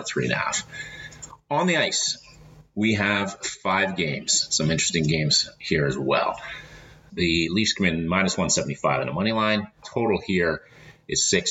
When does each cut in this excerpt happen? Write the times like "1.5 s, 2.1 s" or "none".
7.1 s, 9.8 s